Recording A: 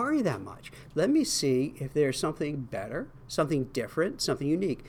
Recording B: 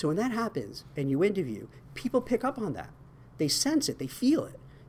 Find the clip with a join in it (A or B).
A